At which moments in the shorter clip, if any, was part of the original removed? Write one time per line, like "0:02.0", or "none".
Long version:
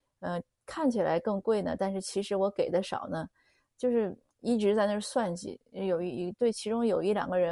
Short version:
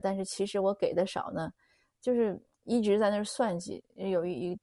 none